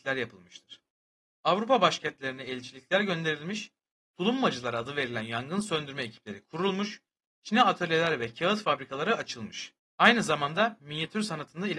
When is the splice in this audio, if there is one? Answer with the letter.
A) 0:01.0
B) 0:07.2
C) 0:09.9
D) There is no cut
B